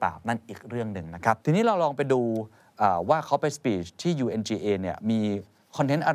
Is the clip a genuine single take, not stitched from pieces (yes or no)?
no